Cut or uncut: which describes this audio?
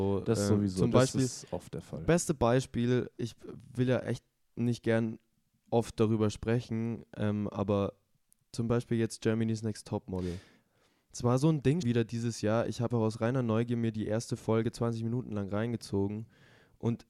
cut